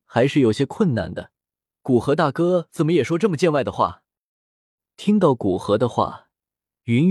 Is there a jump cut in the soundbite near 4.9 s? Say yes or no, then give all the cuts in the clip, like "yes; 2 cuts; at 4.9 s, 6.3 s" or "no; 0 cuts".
no; 1 cut; at 1.8 s